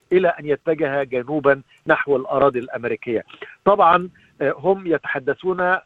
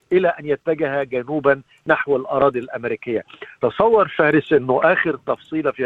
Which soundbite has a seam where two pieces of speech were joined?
second; 1 cut; at 3.6 s

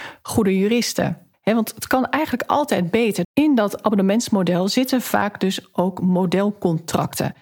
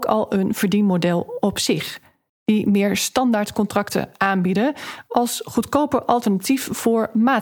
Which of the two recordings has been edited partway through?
first; 1 cut; at 3.2 s

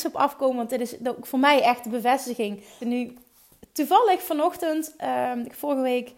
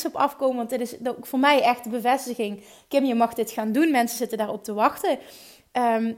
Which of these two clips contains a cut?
first; 1 cut; at 2.8 s

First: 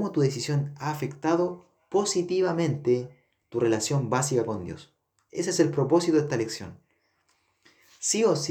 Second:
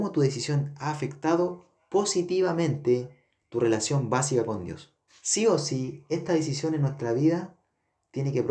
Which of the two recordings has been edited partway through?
second; 1 cut; at 5.1 s

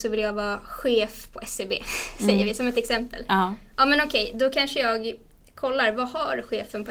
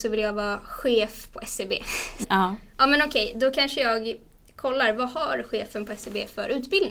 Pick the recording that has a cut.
second; 1 cut; at 2.2 s

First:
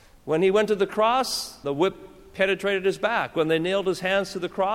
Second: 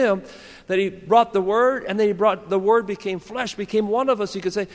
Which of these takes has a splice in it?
first; 1 cut; at 1.6 s

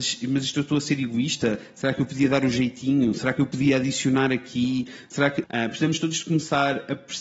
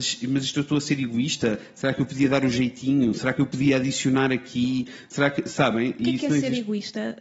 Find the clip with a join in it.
first; 1 cut; at 5.4 s

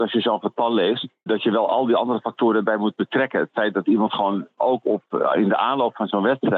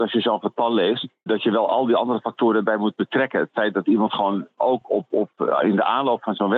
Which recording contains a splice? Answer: first; 1 cut; at 4.8 s

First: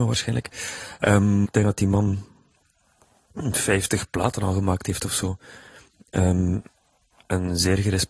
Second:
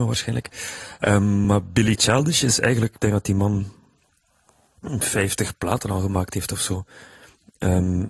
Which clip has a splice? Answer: first; 1 cut; at 1.4 s

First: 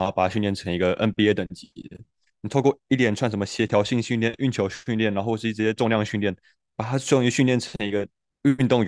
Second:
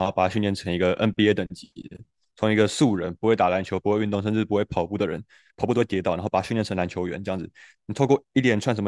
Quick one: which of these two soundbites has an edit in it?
first; 1 cut; at 2.3 s

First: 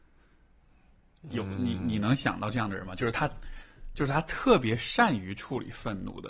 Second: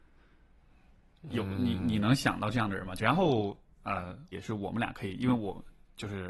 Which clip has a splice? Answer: second; 2 cuts; at 3.0 s, 4.3 s

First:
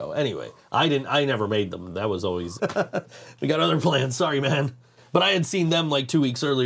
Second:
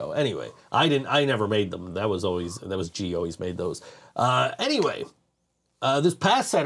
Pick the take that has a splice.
first; 1 cut; at 2.6 s

